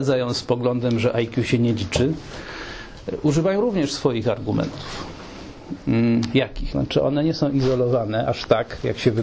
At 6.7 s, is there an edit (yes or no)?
yes